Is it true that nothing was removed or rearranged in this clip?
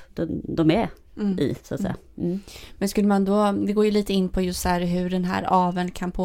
yes; 0 cuts

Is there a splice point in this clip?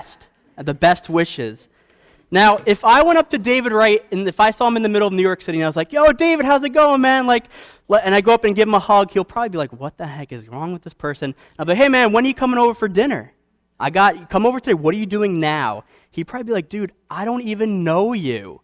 no; 0 cuts

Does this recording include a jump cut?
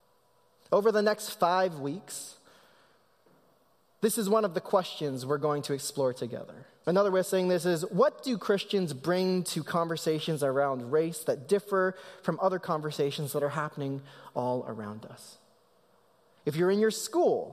yes; 1 cut; at 6.8 s

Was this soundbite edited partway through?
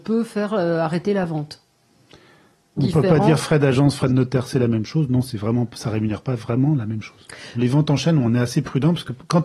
yes; 2 cuts; at 2.8 s, 7.5 s

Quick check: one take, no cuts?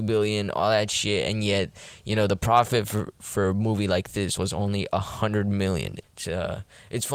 no; 1 cut; at 6.0 s

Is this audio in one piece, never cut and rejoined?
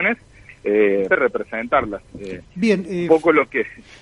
no; 1 cut; at 1.1 s

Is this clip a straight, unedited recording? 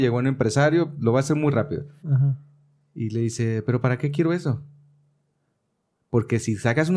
no; 1 cut; at 2.0 s

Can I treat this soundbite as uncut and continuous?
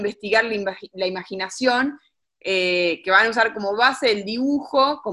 no; 1 cut; at 2.2 s

